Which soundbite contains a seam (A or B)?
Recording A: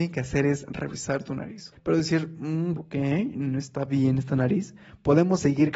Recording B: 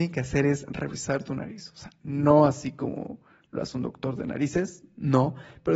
A